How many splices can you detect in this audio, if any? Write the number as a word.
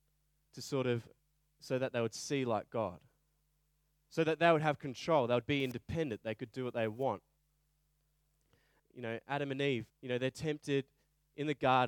two